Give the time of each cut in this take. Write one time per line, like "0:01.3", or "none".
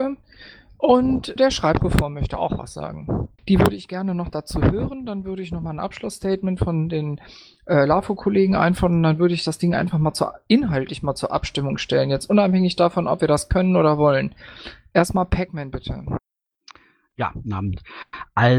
0:01.4
0:03.4